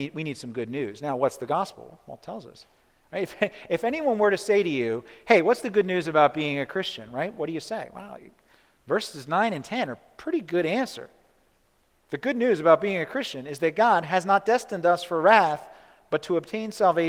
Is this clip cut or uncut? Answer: uncut